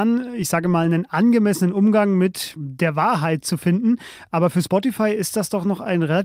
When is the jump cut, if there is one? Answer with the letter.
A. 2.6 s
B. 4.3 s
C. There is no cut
A